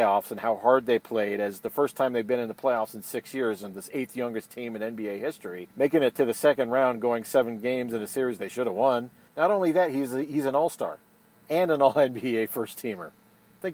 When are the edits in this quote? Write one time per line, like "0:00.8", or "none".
0:05.7
0:09.3
0:11.3